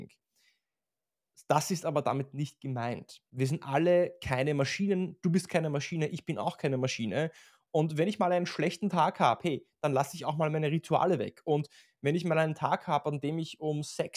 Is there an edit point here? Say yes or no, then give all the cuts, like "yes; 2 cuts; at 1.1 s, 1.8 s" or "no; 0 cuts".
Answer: no; 0 cuts